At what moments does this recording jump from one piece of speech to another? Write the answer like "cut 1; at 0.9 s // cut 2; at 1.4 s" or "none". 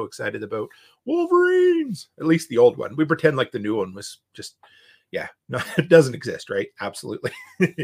none